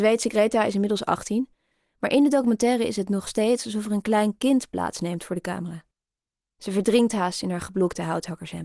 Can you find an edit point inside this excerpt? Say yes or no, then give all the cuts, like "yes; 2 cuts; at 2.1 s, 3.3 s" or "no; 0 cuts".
no; 0 cuts